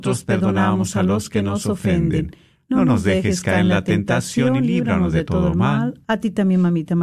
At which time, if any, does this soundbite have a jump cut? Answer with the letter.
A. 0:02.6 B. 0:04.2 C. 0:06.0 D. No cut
C